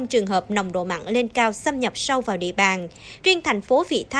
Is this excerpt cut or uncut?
uncut